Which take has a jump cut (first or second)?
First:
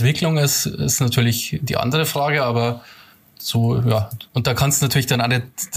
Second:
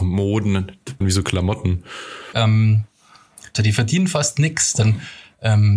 second